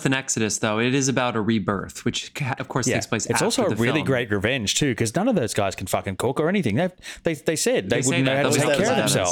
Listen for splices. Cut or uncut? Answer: uncut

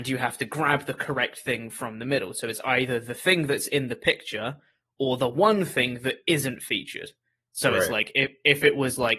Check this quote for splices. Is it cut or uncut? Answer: uncut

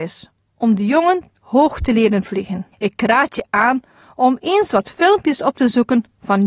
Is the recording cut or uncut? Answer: cut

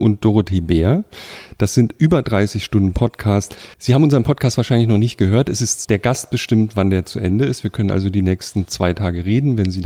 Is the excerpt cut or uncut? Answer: cut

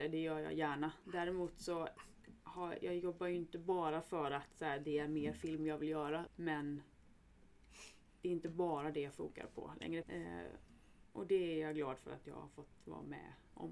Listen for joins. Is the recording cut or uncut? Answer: cut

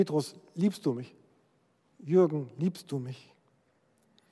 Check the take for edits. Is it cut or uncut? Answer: uncut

